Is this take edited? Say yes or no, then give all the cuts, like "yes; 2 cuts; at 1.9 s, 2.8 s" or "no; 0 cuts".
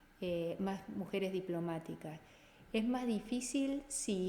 no; 0 cuts